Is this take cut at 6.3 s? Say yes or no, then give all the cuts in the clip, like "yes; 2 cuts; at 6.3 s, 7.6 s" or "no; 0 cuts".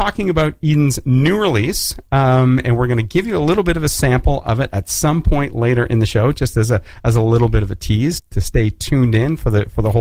no; 1 cut; at 8.2 s